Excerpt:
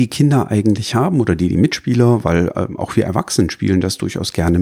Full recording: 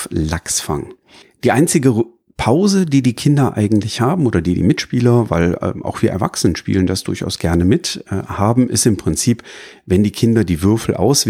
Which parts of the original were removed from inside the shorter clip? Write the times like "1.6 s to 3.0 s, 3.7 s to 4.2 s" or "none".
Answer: none